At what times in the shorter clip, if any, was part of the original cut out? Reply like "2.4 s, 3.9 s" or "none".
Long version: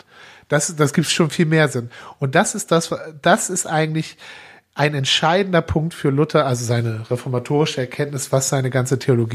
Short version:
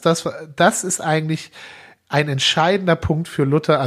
none